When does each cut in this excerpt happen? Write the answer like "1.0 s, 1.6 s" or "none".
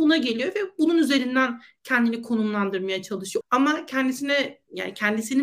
3.4 s